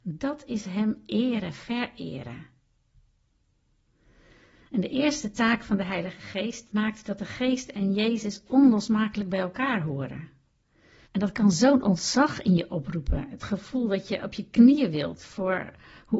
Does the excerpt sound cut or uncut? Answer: cut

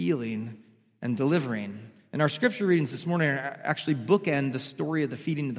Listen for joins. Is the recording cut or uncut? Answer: uncut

